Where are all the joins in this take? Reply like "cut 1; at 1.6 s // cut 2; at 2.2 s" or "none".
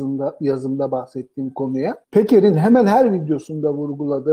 cut 1; at 2.0 s